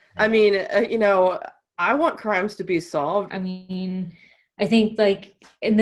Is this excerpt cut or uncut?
cut